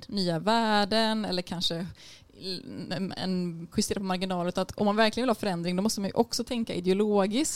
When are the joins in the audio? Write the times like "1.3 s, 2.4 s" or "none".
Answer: 3.7 s

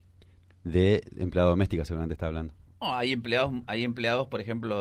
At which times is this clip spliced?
2.7 s

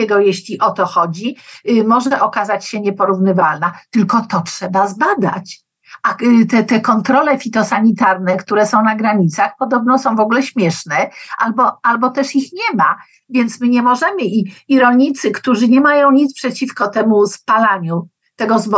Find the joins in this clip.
none

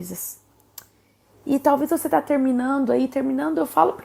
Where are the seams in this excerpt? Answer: none

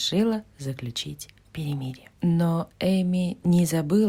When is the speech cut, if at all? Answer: 2.2 s

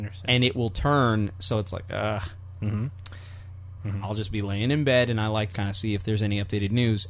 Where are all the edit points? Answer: 2.6 s, 3.8 s, 5.5 s

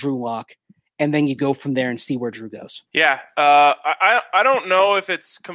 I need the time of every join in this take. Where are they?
2.9 s

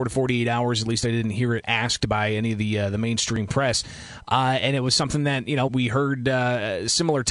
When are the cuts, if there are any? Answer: 5.7 s

